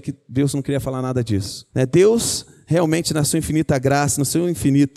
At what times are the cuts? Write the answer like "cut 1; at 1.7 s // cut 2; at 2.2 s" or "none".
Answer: cut 1; at 1.7 s